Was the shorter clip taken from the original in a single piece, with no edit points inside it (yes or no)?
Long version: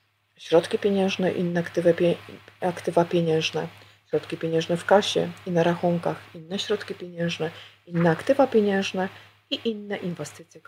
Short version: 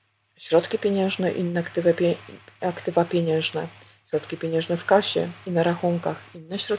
yes